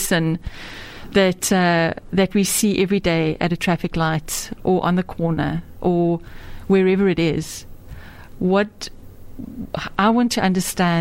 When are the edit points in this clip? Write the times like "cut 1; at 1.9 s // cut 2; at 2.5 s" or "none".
none